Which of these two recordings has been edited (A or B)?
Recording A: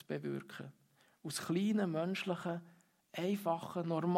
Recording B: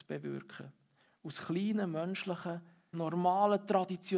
B